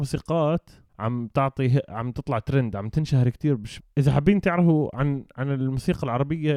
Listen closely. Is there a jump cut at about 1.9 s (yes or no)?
no